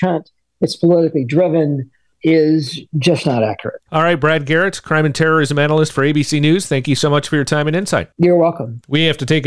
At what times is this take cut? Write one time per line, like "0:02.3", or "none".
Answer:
none

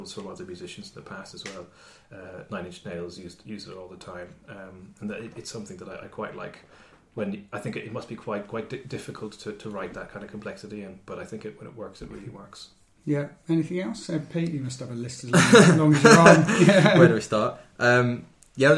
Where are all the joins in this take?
none

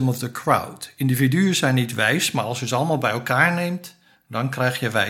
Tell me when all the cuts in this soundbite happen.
none

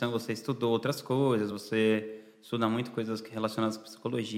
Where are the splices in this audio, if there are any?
none

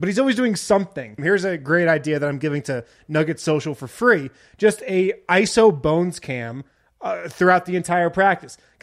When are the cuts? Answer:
0:01.2

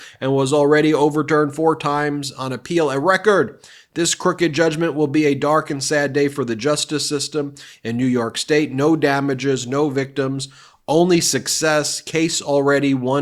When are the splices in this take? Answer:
none

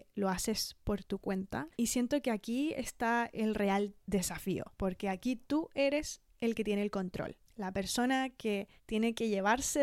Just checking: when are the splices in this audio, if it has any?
0:01.7
0:04.7

